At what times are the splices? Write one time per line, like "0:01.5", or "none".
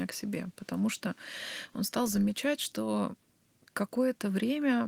none